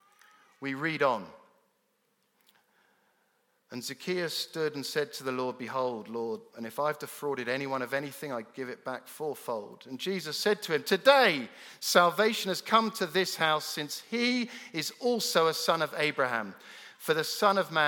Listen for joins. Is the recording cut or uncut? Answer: cut